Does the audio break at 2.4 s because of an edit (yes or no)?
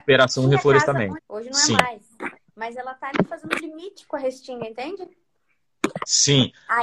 no